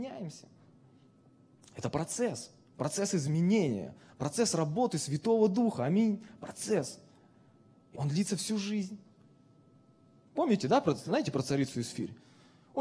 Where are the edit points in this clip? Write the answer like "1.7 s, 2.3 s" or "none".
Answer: 7.9 s, 10.3 s